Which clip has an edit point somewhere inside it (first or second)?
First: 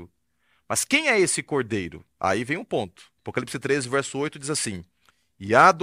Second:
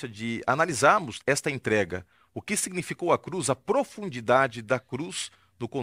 first